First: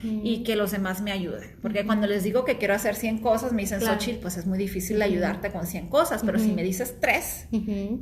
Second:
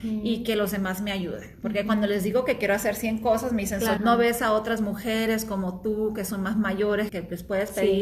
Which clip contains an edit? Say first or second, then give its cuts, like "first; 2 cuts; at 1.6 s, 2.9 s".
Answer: second; 2 cuts; at 4.0 s, 7.1 s